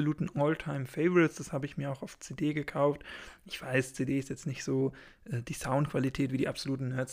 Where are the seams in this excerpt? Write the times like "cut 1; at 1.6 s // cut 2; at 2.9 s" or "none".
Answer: none